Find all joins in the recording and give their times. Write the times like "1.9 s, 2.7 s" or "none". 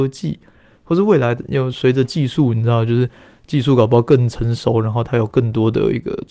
none